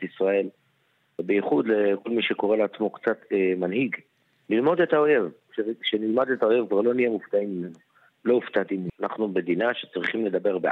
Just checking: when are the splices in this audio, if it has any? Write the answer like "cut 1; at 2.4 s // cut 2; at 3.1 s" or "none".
cut 1; at 8.9 s